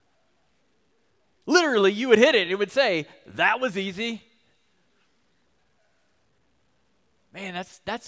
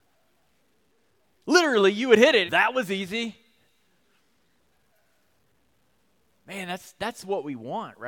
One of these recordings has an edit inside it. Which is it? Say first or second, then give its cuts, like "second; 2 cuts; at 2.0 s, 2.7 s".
second; 1 cut; at 2.5 s